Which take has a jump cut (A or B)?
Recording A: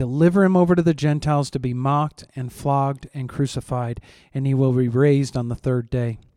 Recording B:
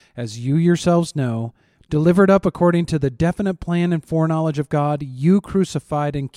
B